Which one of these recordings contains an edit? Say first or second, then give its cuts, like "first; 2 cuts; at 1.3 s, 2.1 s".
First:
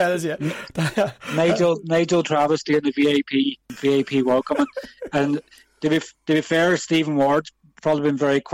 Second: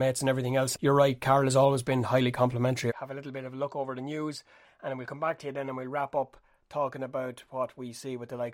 second; 2 cuts; at 2.9 s, 4.6 s